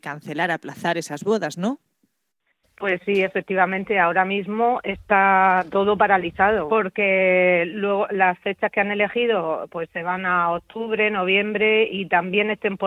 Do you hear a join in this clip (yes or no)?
yes